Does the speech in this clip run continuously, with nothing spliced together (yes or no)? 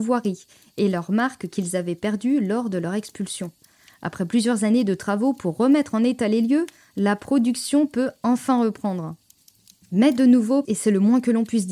no